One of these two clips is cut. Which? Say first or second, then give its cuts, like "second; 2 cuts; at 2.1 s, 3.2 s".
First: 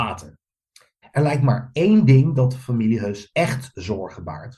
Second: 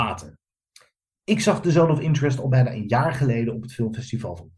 first; 1 cut; at 1.0 s